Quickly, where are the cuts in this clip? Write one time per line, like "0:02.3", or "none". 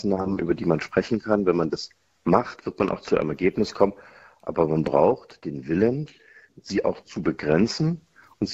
0:06.5